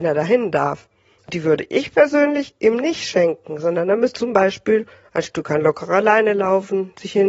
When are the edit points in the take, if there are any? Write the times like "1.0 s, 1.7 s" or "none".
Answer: 4.1 s